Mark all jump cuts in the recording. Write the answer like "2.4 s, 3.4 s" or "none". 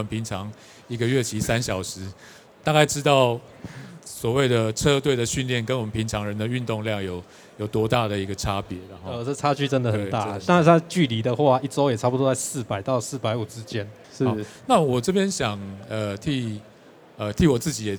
14.0 s